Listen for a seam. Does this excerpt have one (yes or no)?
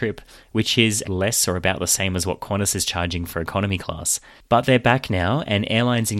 yes